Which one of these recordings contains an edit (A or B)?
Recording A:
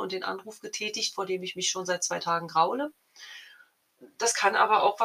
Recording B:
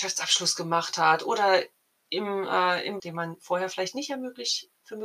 B